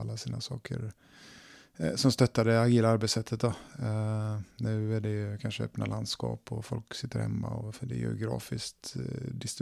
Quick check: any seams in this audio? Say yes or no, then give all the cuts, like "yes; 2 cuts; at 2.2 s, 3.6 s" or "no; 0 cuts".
no; 0 cuts